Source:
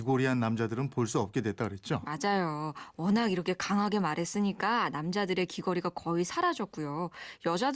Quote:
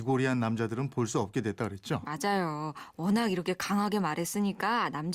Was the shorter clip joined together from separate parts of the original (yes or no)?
no